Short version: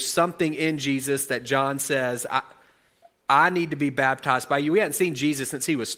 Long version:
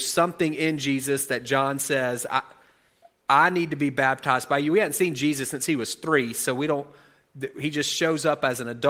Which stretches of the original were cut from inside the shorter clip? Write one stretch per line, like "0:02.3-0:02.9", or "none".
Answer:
none